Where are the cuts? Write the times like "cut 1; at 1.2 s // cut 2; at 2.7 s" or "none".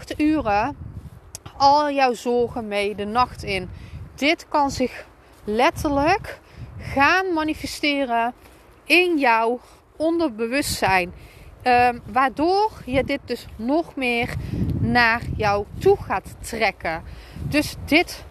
none

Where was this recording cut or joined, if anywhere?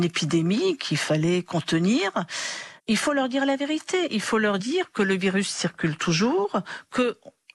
cut 1; at 2.8 s

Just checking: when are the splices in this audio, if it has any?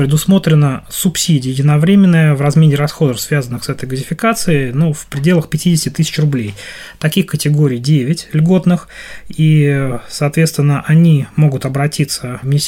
none

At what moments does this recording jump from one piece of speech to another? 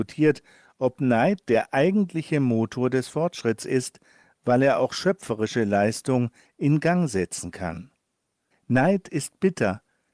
cut 1; at 8.5 s

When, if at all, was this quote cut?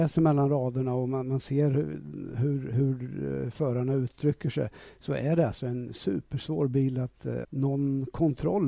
cut 1; at 7.4 s

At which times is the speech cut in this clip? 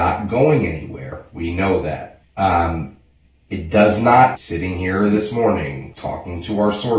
cut 1; at 2.2 s // cut 2; at 4.4 s // cut 3; at 5.9 s

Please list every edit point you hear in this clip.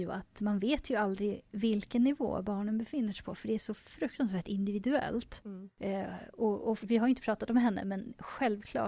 cut 1; at 6.8 s

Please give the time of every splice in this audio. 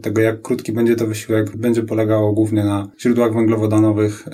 cut 1; at 1.5 s // cut 2; at 2.9 s

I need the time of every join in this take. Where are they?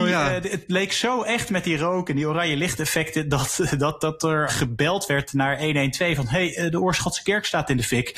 cut 1; at 4.5 s

